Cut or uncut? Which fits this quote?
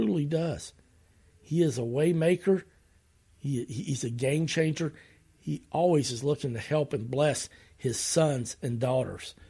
uncut